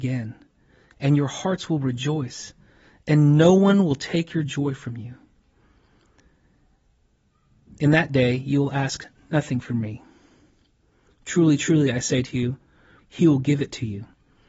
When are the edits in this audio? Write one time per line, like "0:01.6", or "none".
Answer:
0:13.0